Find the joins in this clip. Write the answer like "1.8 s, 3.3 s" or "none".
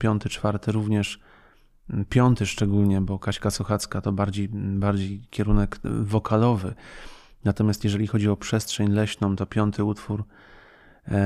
none